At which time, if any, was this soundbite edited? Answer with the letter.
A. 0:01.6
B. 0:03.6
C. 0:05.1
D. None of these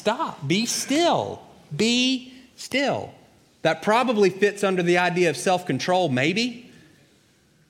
D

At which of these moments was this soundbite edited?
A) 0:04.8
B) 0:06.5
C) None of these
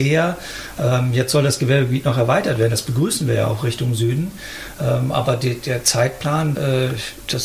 B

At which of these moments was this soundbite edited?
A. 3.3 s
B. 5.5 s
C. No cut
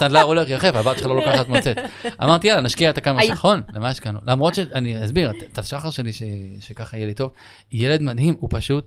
A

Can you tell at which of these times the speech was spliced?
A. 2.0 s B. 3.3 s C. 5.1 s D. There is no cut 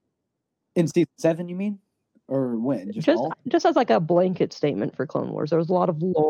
B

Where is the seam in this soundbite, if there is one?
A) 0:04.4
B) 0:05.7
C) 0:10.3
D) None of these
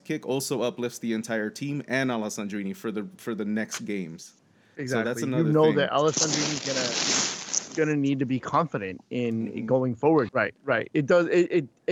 C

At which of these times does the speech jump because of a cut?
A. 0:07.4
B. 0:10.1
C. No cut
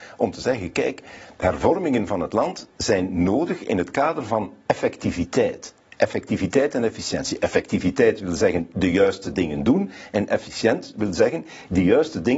C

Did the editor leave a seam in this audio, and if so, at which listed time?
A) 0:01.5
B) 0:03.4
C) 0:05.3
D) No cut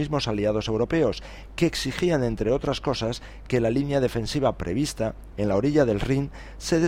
C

